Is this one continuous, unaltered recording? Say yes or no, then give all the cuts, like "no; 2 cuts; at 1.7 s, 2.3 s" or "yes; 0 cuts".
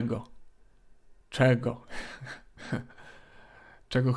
yes; 0 cuts